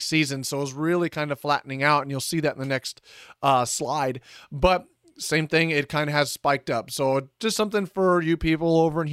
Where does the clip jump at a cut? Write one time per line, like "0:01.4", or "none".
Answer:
none